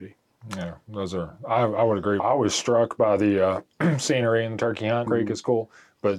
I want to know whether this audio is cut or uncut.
cut